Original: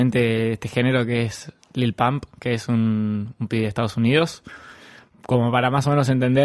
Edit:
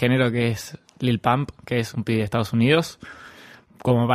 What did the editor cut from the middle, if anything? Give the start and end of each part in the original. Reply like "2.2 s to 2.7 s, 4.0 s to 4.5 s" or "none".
2.7 s to 3.4 s